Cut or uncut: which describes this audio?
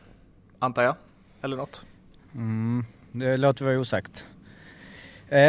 uncut